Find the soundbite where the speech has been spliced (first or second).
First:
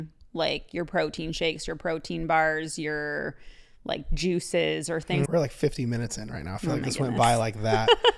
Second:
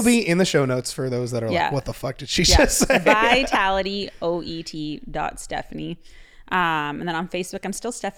first